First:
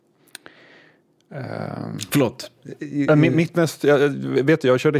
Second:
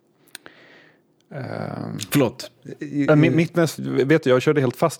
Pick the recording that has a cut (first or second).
second